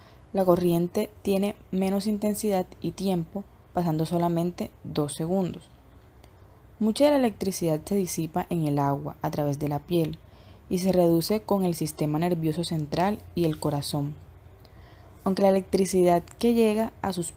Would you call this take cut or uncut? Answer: uncut